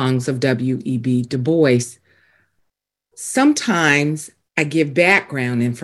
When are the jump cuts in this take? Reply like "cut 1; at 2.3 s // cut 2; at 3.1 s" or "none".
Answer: none